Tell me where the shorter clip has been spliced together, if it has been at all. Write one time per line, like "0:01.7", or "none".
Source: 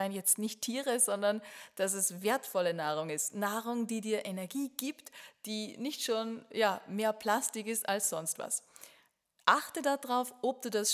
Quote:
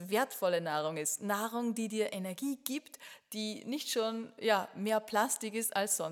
none

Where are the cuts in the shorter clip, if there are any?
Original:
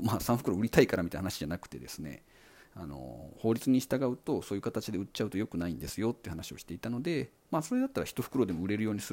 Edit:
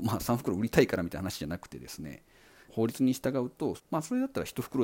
0:02.7
0:03.8

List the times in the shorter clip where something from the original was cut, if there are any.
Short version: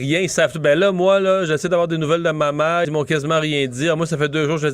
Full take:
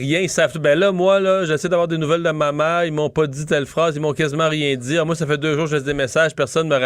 0:02.8

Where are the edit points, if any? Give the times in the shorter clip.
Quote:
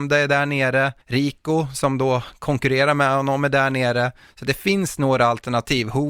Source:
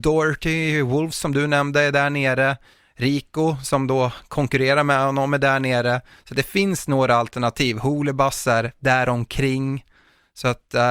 0:01.0

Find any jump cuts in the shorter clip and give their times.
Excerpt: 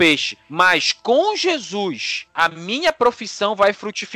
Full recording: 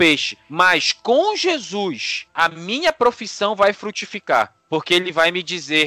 none

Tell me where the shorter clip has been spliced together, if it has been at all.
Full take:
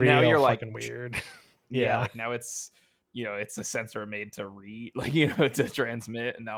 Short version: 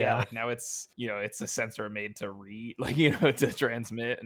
0:00.9

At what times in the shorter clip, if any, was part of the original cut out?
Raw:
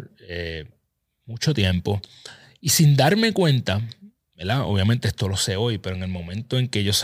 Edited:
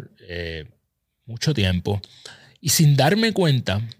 none

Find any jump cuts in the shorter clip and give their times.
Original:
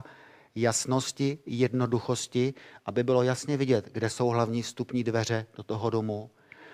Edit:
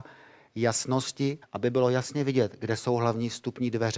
0:01.4

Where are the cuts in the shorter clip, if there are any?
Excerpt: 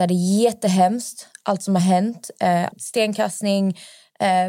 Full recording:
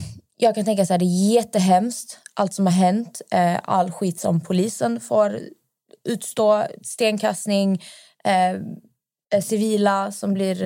0:02.7

